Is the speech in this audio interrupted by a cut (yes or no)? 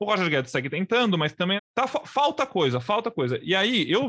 yes